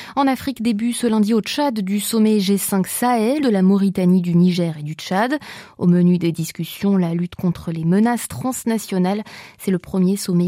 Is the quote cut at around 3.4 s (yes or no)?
yes